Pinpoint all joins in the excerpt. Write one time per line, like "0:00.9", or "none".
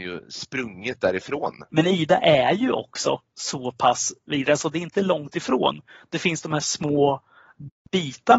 0:01.7
0:06.6